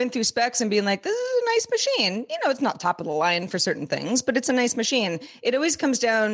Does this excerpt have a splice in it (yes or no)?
no